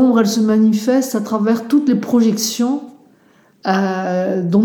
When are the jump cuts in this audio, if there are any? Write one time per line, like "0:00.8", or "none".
none